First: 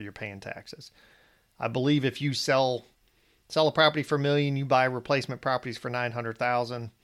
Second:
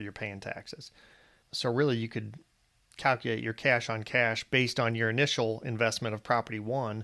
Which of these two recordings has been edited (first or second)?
second